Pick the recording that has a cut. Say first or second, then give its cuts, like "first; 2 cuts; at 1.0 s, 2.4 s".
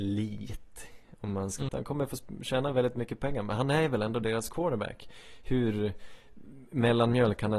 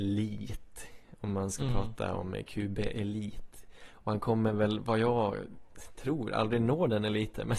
first; 1 cut; at 1.7 s